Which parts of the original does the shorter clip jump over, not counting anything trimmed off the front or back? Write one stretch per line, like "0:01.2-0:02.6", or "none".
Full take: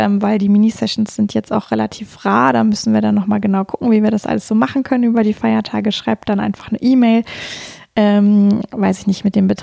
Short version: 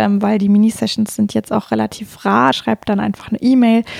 0:02.5-0:05.9